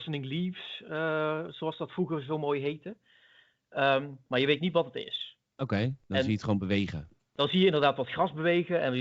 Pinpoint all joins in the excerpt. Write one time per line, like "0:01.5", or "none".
0:04.3